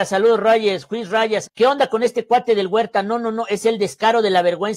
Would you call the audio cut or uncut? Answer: cut